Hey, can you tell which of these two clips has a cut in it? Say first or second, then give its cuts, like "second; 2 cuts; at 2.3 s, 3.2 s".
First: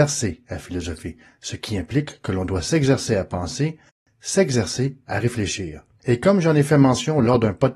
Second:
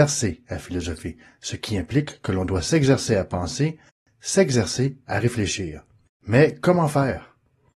first; 1 cut; at 6.0 s